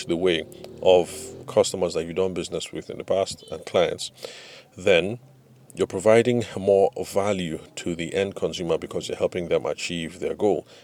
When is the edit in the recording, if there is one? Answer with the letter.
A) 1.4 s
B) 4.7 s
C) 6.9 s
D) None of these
A